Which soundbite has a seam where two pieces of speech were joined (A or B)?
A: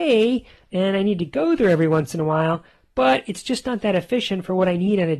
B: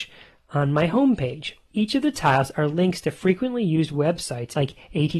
B